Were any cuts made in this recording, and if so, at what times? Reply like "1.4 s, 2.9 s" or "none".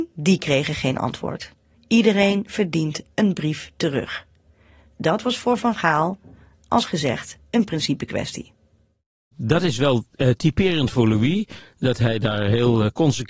1.7 s